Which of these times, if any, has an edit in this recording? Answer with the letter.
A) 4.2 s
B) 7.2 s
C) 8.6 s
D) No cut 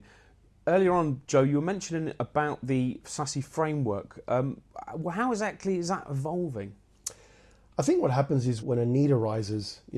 C